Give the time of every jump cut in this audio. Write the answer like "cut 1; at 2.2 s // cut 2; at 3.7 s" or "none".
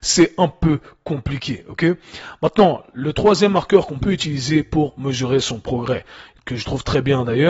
none